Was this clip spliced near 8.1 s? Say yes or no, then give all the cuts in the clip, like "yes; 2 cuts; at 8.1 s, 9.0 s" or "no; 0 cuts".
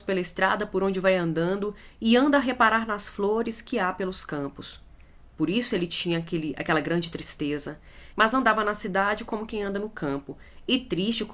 yes; 1 cut; at 8.1 s